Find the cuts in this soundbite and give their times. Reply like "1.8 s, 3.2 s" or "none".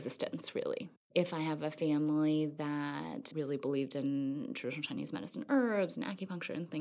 none